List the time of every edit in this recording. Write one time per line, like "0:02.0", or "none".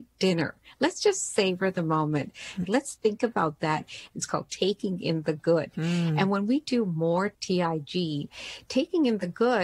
0:02.6
0:04.1